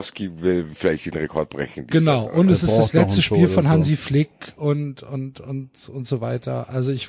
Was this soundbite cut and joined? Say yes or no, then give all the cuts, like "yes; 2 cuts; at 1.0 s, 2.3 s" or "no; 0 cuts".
no; 0 cuts